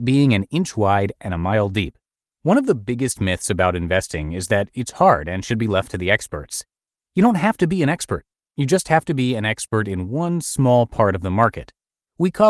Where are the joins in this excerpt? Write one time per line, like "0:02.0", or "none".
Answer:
0:02.3

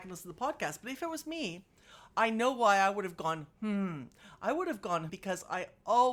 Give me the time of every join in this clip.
0:05.1

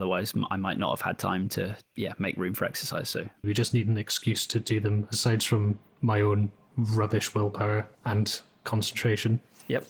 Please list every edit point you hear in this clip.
0:03.4
0:07.9

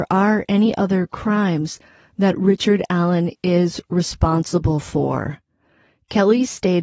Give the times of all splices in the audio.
none

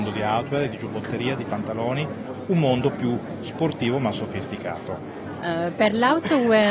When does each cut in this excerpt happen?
0:05.4

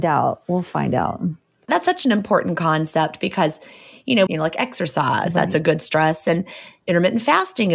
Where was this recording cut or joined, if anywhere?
0:04.3

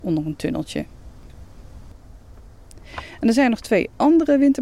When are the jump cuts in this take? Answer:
none

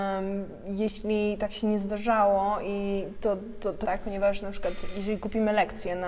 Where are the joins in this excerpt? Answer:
0:03.8

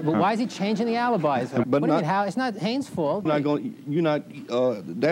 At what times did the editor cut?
0:01.6
0:03.3

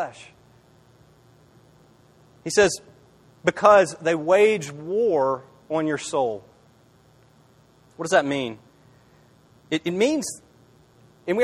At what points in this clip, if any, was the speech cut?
none

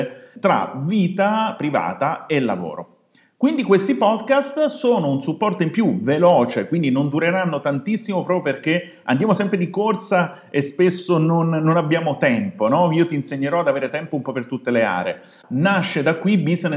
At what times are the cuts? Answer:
0:15.4

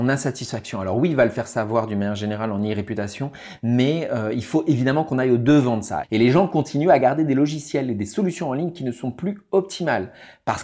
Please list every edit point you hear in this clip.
0:06.0

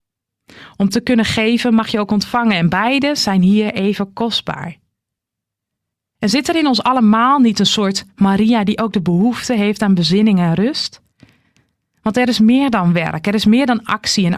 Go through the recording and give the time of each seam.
none

